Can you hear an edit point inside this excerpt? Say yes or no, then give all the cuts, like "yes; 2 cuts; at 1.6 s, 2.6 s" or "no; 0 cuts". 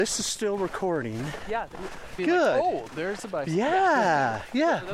yes; 1 cut; at 2.2 s